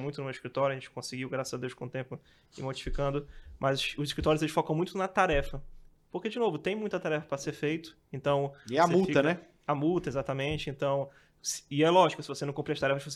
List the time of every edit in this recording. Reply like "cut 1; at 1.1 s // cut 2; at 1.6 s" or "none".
none